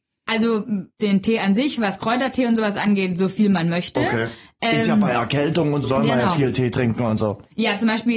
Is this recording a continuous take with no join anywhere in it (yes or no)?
no